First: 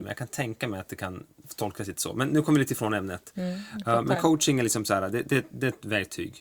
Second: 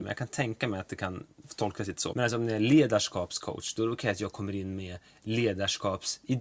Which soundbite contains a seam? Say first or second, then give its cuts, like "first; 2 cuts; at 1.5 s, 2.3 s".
second; 1 cut; at 2.1 s